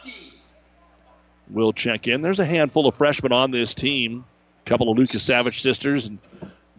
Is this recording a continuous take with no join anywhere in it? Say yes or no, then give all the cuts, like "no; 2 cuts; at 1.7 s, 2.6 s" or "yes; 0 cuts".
yes; 0 cuts